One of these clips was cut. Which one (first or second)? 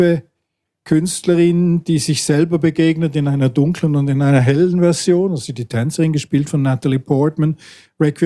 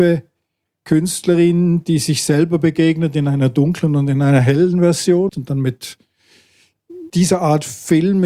second